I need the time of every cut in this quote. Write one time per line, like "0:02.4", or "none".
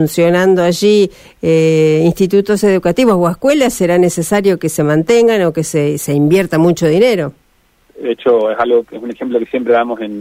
0:07.9